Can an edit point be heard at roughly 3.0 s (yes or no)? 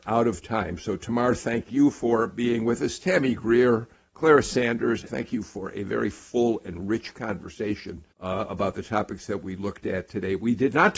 no